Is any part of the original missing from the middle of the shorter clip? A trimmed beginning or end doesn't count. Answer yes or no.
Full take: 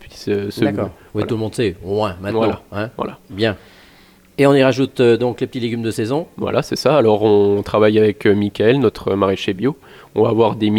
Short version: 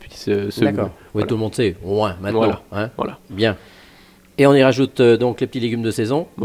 no